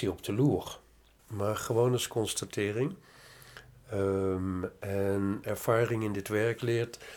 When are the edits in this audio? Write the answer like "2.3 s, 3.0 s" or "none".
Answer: 1.2 s

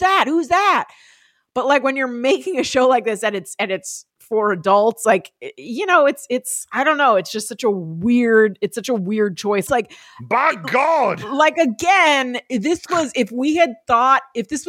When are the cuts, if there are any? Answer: 9.7 s

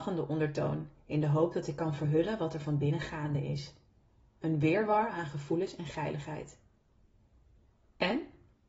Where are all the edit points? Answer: none

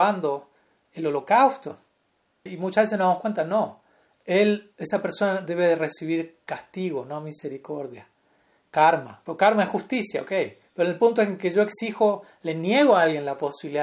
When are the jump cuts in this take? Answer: 2.5 s

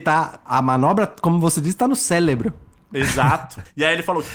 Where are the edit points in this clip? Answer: none

